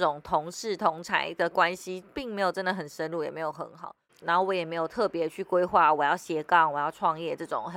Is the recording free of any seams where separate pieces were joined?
no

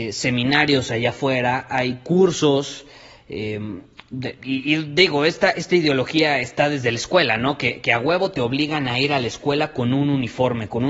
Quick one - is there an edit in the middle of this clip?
no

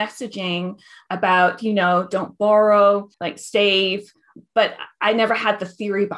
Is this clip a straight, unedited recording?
no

